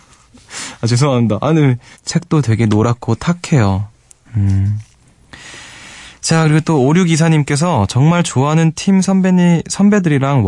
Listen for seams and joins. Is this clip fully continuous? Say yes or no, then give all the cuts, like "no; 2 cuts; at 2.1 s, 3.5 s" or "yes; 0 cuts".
no; 2 cuts; at 1.9 s, 4.2 s